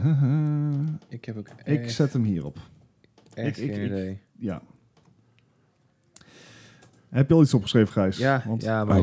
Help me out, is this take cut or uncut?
uncut